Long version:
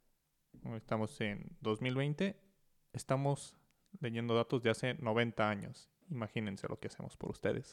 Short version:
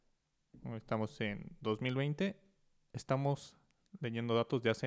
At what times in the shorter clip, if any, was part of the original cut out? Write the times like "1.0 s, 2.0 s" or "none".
none